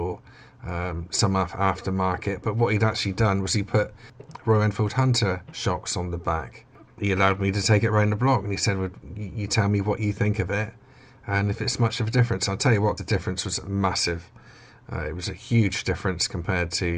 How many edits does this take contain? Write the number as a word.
one